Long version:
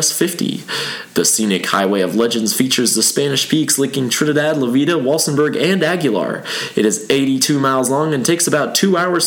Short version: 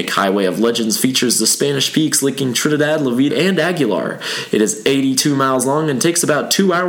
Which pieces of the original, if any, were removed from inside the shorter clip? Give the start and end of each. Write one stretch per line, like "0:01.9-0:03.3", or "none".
0:04.9-0:05.5

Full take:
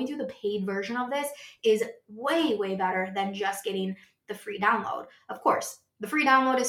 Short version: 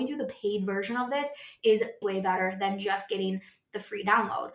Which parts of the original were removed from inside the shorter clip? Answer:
0:02.0-0:02.6

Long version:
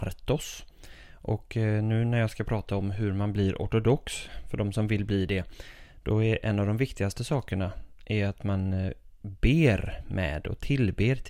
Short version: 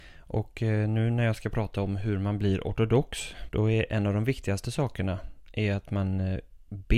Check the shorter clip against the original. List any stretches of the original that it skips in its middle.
0:04.4-0:06.0

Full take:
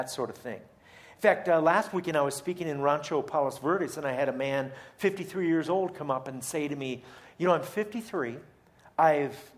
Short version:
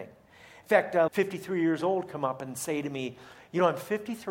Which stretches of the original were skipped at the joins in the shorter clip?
0:01.6-0:04.9

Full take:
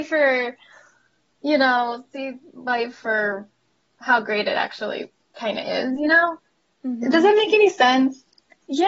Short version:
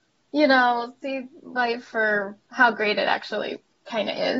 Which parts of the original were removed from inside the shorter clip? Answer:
0:03.5-0:03.9

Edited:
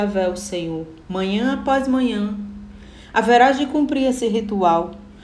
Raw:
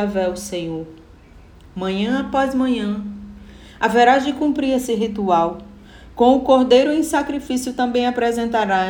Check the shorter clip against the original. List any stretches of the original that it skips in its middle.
0:01.0-0:01.7

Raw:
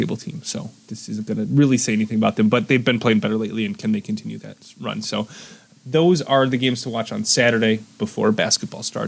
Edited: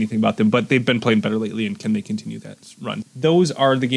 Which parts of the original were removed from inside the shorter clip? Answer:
0:05.0-0:05.7

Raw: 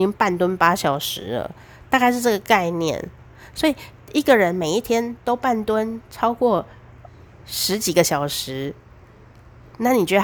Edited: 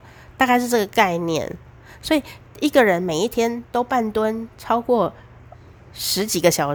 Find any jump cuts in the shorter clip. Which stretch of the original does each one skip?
none

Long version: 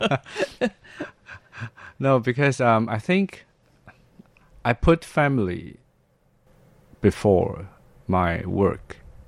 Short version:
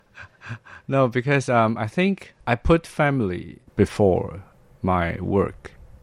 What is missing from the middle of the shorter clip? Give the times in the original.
0:03.5-0:04.6
0:05.8-0:06.9

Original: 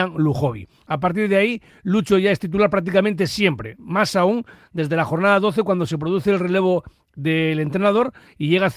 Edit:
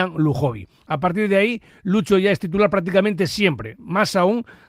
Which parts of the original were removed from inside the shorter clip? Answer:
none

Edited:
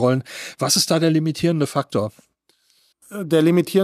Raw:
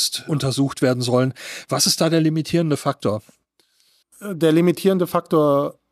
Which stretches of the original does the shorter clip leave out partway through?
none

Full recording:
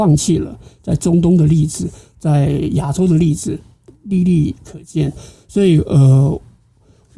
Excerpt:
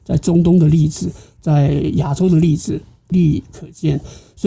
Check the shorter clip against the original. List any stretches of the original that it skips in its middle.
0:03.9-0:04.2

